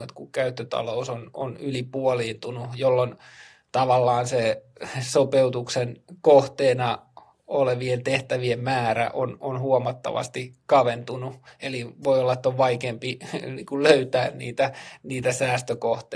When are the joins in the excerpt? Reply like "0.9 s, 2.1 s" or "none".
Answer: none